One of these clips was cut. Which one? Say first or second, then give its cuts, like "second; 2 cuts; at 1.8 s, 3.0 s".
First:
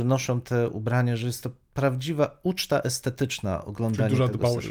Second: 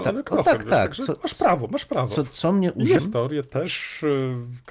second; 1 cut; at 3.0 s